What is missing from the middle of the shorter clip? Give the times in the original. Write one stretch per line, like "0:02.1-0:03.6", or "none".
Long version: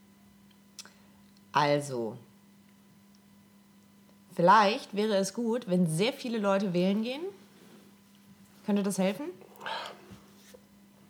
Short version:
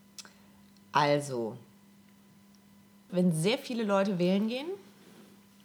0:03.7-0:05.6